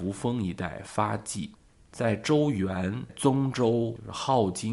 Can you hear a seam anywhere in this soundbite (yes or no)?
no